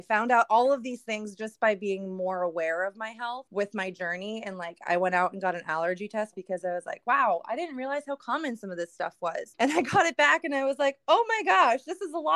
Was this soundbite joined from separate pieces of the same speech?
no; 0 cuts

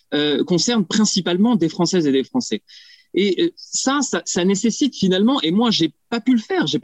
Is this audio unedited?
yes; 0 cuts

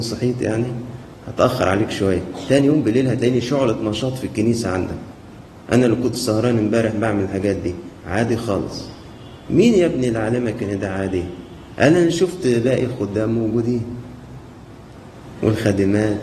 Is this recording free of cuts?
no; 1 cut; at 8.0 s

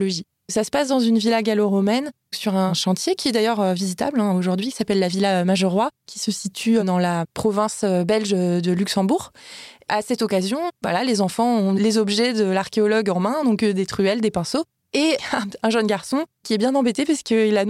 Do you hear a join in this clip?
no; 0 cuts

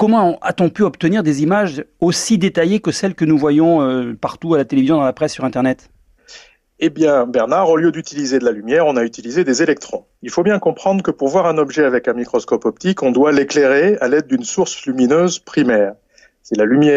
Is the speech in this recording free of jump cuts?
yes; 0 cuts

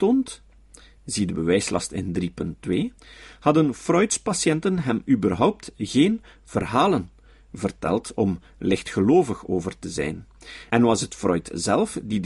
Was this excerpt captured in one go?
no; 1 cut; at 3.0 s

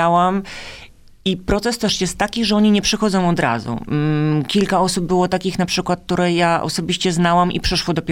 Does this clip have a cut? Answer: no; 0 cuts

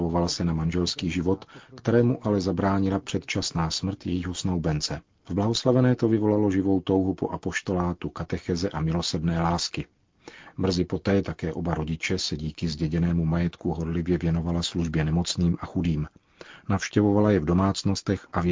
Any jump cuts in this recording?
yes; 1 cut; at 11.2 s

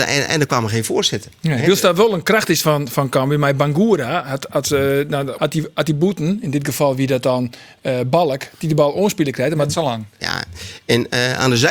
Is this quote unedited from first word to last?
no; 2 cuts; at 5.4 s, 10.2 s

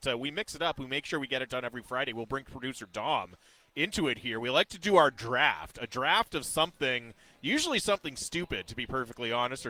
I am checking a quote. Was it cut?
no; 0 cuts

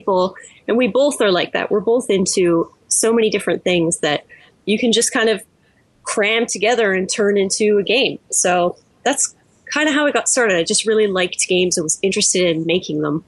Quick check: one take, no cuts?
yes; 0 cuts

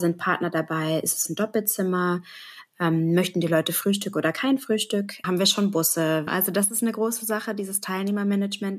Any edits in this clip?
yes; 2 cuts; at 5.2 s, 6.3 s

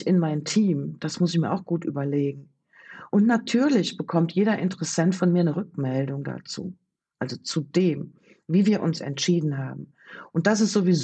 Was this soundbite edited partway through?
no; 0 cuts

